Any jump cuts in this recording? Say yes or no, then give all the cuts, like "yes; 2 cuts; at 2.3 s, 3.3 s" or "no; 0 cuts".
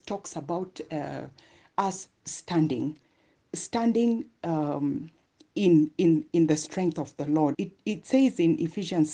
yes; 1 cut; at 7.5 s